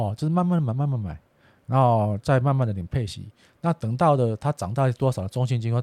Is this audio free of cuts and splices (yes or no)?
yes